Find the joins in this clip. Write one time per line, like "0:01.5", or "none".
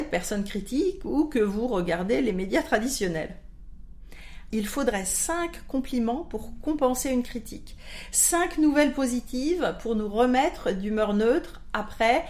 0:04.5